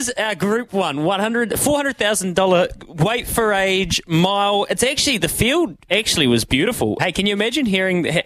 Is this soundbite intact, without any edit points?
no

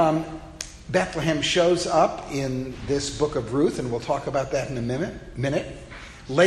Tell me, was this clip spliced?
no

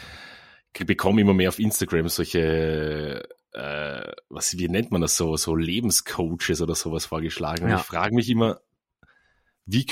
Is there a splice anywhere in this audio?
no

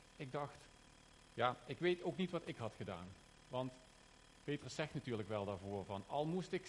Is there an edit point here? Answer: no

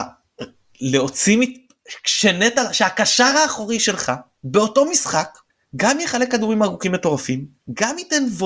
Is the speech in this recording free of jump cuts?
yes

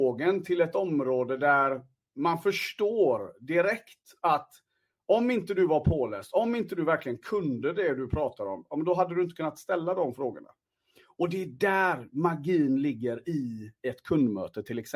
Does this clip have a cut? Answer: no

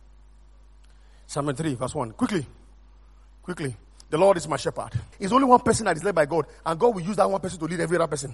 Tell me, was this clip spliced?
yes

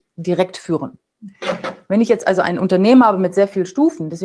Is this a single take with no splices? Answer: yes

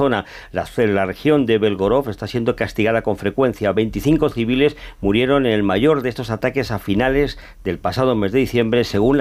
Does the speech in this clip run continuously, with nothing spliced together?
yes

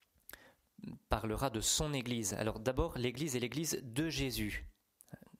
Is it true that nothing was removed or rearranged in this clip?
yes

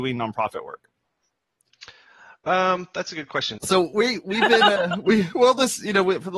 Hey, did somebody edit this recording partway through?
yes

